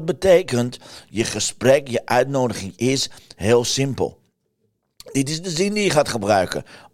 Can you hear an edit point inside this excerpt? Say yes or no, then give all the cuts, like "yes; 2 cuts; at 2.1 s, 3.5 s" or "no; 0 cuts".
no; 0 cuts